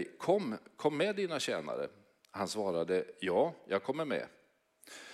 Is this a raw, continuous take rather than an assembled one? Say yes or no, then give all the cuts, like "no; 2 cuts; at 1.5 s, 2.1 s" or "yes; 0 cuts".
yes; 0 cuts